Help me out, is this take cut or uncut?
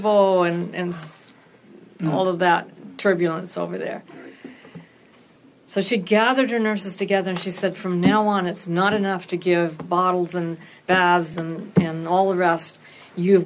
uncut